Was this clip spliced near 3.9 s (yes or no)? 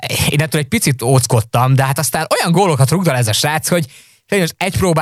no